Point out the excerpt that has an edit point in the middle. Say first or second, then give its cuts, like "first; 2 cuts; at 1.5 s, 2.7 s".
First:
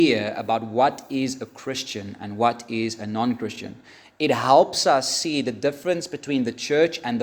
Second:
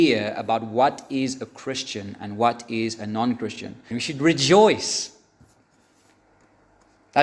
second; 1 cut; at 3.9 s